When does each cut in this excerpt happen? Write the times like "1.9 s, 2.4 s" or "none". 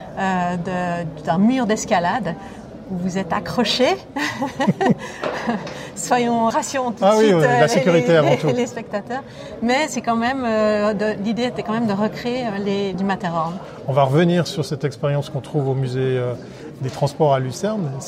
6.5 s, 12.9 s